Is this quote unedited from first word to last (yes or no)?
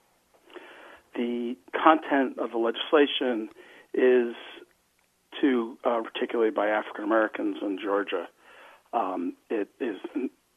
no